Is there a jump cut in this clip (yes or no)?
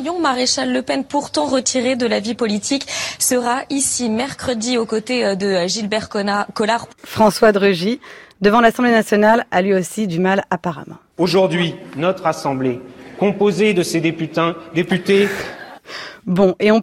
no